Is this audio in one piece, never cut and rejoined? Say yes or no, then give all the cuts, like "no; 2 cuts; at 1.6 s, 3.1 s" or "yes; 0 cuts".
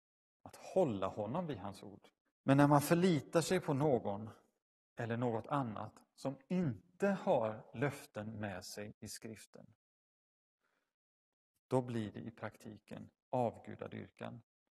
no; 1 cut; at 2.2 s